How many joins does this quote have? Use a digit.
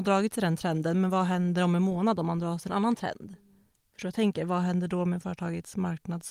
0